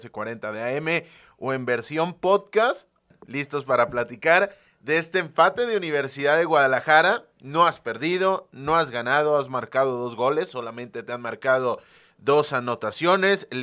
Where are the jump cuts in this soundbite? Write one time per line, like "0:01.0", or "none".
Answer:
none